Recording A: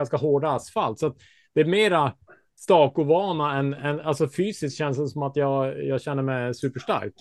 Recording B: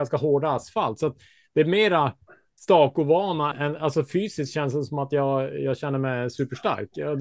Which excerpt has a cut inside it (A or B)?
B